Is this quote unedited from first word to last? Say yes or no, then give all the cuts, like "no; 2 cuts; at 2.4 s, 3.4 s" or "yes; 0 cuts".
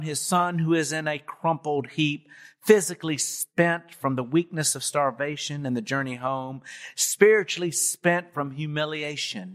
yes; 0 cuts